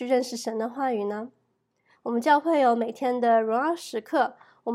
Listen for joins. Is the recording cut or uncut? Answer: cut